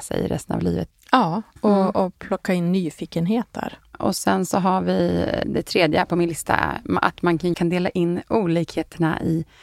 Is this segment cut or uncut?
cut